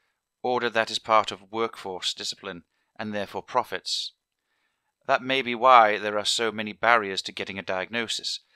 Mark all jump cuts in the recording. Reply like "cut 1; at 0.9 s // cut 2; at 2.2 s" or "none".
none